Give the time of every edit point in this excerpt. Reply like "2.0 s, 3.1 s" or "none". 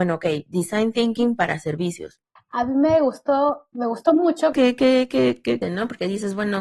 2.4 s, 4.5 s, 5.6 s